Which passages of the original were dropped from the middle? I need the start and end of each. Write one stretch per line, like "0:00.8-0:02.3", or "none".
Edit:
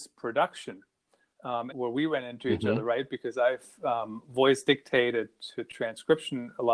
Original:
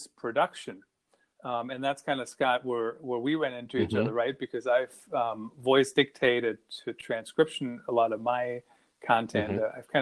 0:01.7-0:03.0